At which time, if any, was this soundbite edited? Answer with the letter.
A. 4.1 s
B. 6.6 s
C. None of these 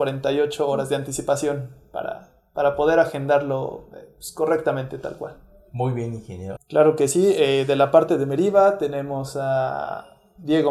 B